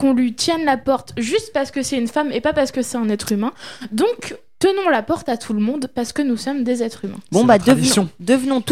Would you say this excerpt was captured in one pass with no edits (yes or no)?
yes